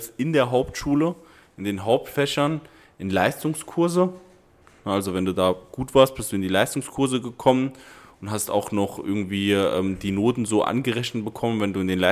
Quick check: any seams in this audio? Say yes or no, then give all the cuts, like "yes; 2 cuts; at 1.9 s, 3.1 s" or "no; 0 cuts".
no; 0 cuts